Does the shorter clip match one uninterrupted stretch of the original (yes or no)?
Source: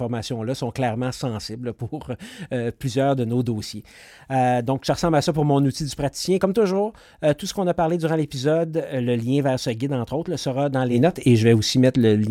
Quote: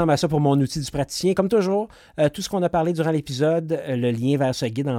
yes